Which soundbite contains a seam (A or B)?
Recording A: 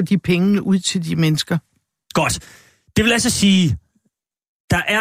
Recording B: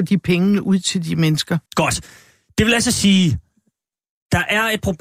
B